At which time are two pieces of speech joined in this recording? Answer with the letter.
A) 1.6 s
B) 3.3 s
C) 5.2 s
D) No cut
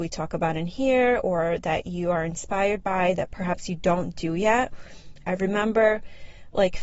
C